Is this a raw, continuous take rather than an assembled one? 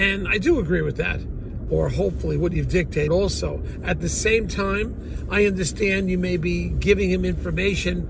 no; 2 cuts; at 1.7 s, 3.1 s

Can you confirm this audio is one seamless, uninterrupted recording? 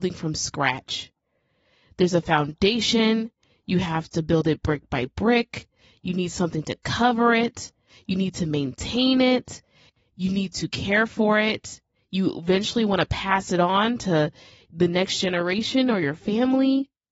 yes; 0 cuts

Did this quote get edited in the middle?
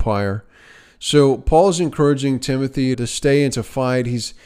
yes; 1 cut; at 2.9 s

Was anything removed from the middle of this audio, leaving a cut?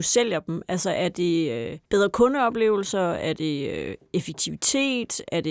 yes; 1 cut; at 1.9 s

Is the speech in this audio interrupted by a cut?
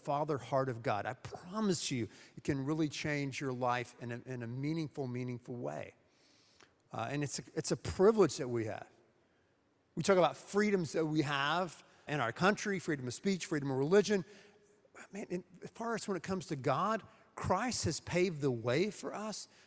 yes; 1 cut; at 12.1 s

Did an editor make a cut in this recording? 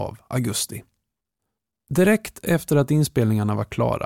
no; 0 cuts

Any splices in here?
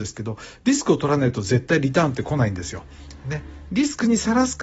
no; 0 cuts

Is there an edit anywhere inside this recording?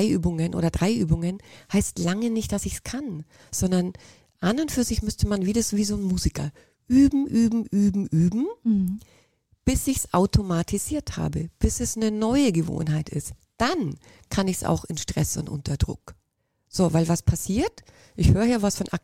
no; 0 cuts

